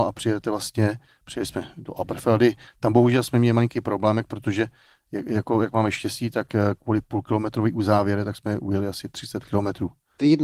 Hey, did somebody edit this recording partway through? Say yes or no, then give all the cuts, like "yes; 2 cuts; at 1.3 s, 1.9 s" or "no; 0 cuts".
no; 0 cuts